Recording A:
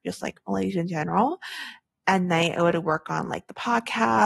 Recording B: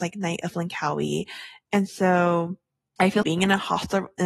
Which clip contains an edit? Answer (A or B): B